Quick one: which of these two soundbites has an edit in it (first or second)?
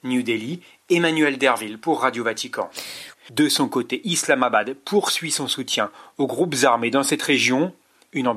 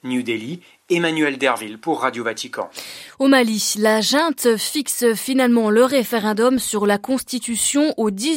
first